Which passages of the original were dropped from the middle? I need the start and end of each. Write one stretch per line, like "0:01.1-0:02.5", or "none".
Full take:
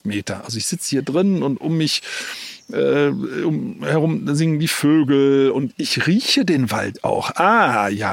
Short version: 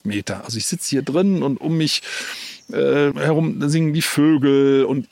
0:03.1-0:03.8